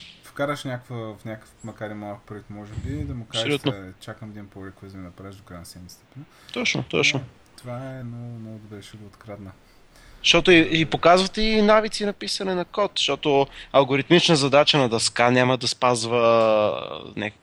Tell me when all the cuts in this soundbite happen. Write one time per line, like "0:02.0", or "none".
none